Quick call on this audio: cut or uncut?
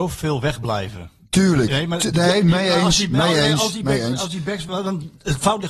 uncut